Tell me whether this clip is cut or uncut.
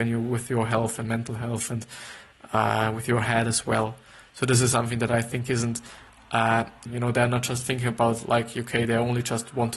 cut